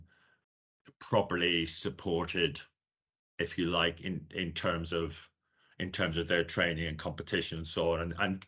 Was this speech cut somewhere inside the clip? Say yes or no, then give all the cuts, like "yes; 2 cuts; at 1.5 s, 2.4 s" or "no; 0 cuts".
no; 0 cuts